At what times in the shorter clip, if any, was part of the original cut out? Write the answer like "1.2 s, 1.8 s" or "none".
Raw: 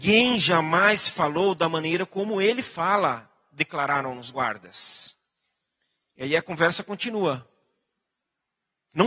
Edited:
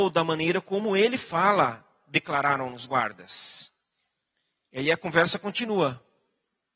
none

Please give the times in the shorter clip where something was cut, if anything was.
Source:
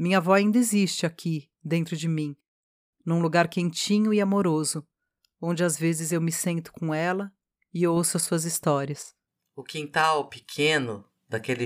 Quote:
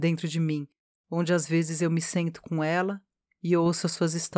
1.0 s

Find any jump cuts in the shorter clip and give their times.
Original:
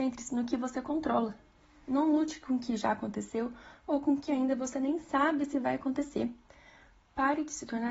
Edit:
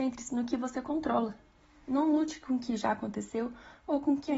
none

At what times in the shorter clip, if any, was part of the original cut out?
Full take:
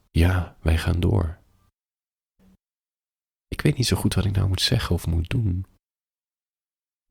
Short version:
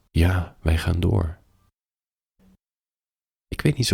none

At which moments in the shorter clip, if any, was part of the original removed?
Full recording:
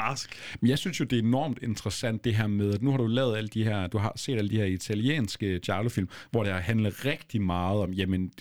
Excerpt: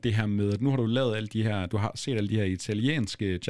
none

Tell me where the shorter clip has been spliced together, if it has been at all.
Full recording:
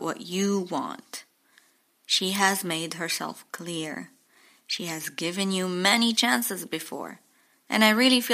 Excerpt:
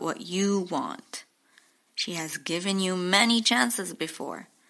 1.9 s

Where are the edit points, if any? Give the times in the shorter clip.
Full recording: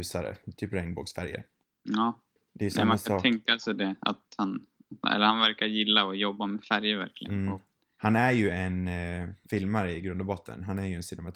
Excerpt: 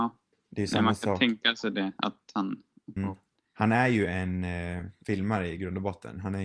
3.0 s

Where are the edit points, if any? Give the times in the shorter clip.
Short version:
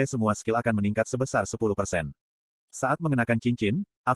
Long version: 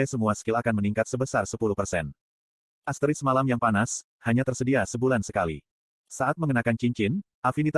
2.6 s

